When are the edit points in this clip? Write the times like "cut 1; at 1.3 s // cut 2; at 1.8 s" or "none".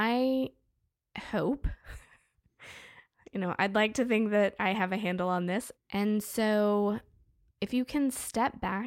cut 1; at 5.7 s // cut 2; at 7.6 s